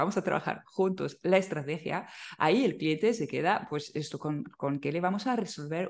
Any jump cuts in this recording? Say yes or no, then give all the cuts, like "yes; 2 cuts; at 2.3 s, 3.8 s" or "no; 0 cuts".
no; 0 cuts